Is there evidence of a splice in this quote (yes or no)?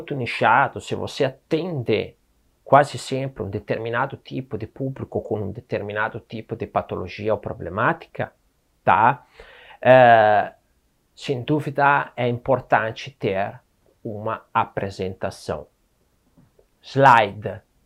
no